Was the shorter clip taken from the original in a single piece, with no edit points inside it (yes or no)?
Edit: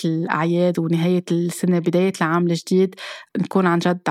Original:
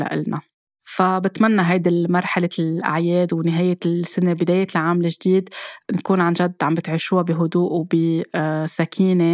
yes